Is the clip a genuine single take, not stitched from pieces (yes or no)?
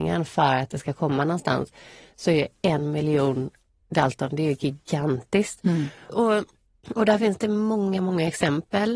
no